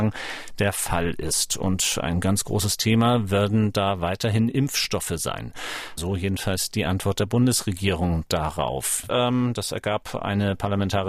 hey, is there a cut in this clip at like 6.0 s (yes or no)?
yes